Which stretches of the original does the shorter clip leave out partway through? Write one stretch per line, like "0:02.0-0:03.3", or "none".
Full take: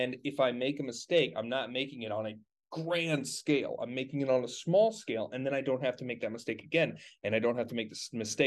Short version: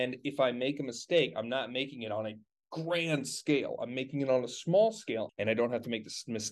0:05.3-0:07.1